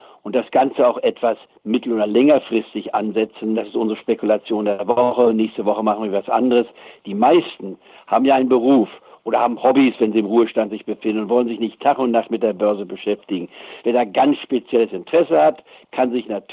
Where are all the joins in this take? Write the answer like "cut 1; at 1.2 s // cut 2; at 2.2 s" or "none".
cut 1; at 3.5 s // cut 2; at 7.0 s // cut 3; at 13.8 s

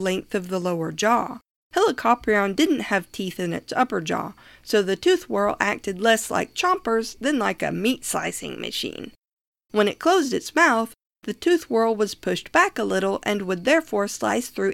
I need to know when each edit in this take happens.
cut 1; at 1.5 s

